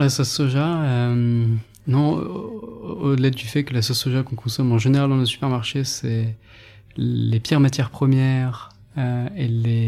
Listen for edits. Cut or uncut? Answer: uncut